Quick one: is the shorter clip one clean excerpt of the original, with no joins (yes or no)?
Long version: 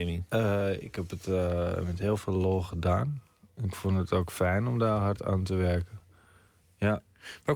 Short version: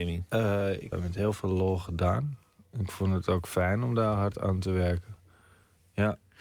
no